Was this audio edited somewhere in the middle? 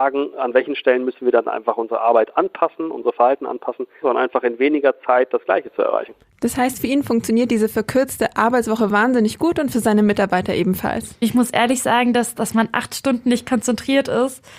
yes; 1 cut; at 4.0 s

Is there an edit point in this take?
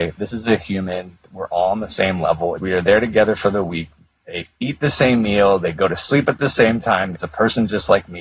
yes; 2 cuts; at 2.6 s, 7.1 s

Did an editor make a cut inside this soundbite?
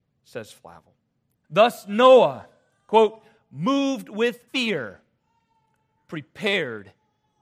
yes; 2 cuts; at 1.4 s, 4.5 s

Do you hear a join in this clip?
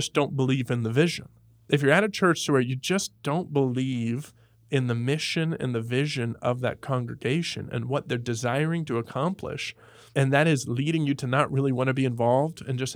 yes; 2 cuts; at 1.7 s, 10.1 s

